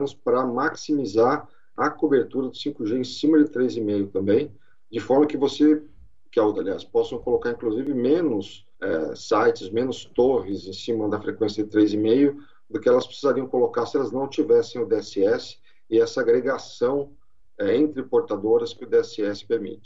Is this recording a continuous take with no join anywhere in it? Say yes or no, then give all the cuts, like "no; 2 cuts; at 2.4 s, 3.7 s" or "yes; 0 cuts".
no; 2 cuts; at 6.5 s, 8.7 s